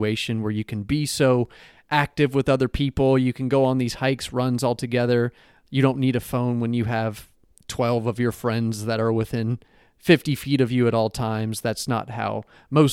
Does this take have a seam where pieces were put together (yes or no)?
no